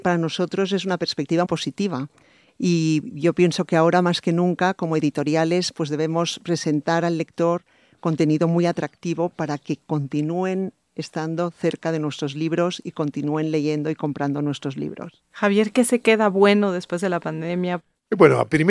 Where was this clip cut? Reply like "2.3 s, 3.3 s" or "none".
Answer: 1.4 s